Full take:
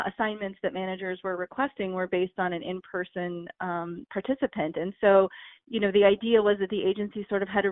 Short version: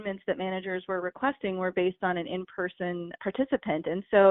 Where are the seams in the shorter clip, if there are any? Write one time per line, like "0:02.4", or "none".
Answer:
0:03.2